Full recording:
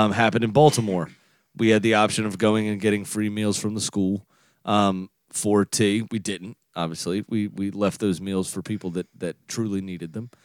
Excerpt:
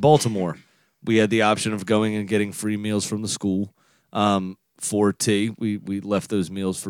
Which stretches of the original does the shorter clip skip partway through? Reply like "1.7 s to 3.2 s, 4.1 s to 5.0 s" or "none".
6.1 s to 7.3 s